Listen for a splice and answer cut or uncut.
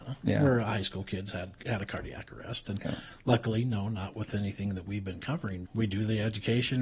cut